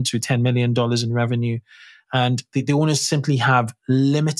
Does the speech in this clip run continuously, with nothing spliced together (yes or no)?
yes